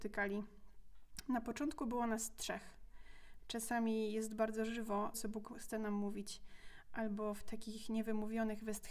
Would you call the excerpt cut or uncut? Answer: cut